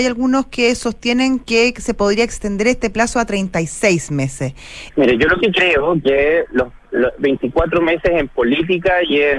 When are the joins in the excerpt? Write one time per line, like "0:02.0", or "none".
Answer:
0:04.9